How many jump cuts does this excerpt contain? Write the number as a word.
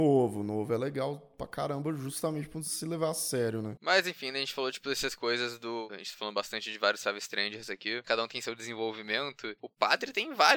two